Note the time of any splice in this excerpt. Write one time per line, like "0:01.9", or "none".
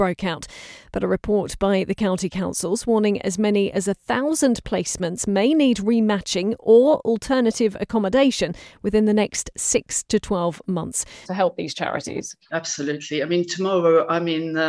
0:11.2
0:12.5